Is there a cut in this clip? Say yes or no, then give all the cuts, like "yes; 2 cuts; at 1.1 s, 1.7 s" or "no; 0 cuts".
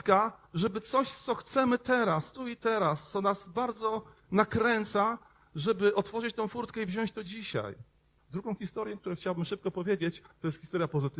yes; 1 cut; at 8.2 s